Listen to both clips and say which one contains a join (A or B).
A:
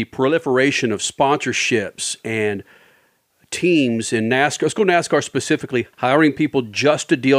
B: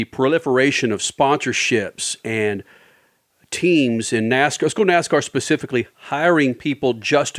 A